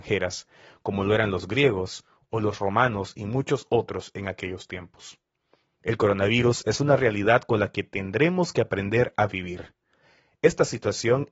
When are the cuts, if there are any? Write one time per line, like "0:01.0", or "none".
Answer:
none